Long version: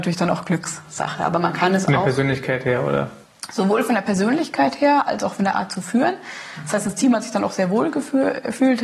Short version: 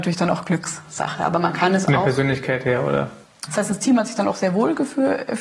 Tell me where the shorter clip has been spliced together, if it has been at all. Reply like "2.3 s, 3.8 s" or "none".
3.5 s